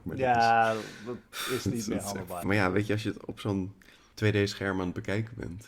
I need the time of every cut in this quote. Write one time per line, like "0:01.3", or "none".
0:02.4